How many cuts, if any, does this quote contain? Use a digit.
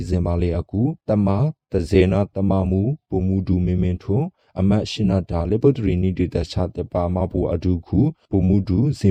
1